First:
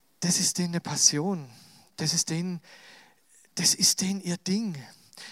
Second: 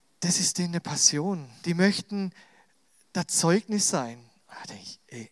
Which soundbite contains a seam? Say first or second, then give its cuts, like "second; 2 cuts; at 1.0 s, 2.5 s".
second; 1 cut; at 1.6 s